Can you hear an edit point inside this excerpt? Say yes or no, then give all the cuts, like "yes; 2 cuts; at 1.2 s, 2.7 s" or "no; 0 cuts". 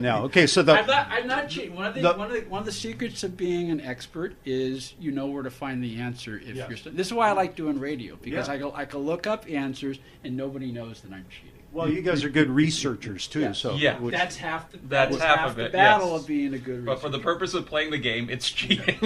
no; 0 cuts